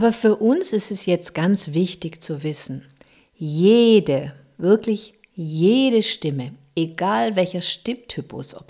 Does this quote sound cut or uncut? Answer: uncut